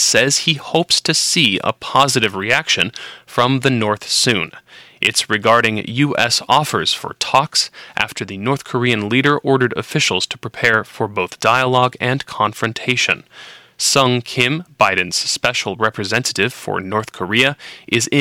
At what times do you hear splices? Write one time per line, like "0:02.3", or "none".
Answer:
none